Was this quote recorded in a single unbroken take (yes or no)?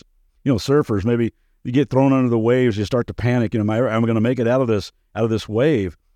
yes